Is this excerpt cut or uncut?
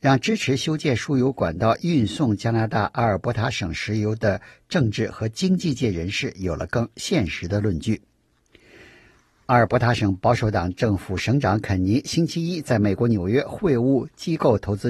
uncut